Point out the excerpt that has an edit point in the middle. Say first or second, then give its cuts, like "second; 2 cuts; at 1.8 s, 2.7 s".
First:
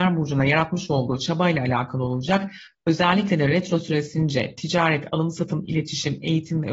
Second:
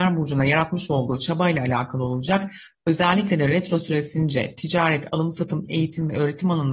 second; 1 cut; at 5.7 s